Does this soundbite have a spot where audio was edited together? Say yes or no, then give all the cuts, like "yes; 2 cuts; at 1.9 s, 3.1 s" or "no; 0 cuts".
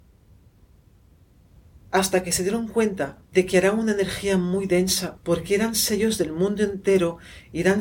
yes; 2 cuts; at 3.2 s, 5.2 s